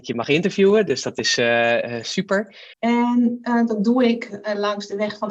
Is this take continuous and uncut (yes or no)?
no